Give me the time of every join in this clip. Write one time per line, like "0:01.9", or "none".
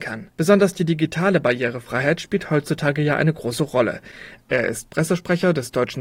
0:04.4